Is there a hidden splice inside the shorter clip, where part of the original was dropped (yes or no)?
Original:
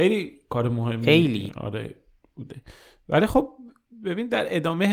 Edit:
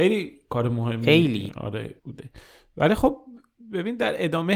yes